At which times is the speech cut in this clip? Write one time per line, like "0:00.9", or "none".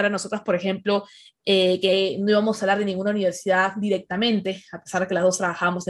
none